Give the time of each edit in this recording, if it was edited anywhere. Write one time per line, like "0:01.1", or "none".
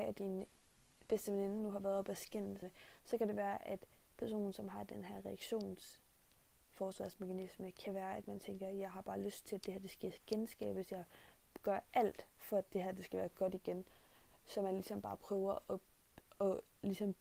0:02.6